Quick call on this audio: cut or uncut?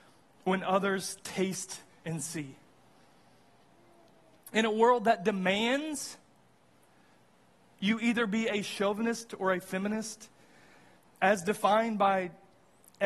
uncut